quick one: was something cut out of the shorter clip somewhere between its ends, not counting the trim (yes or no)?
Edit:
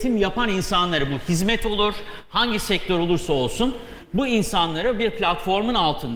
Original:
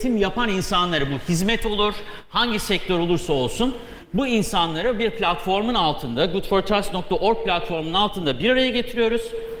no